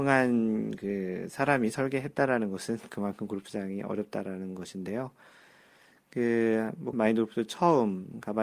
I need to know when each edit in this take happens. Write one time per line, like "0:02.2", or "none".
0:06.9